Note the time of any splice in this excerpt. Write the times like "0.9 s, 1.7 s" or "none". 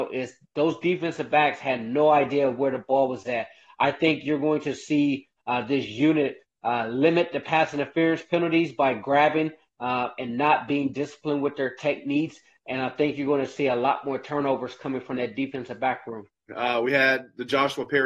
16.5 s